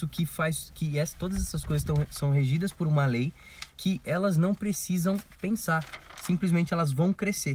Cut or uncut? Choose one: uncut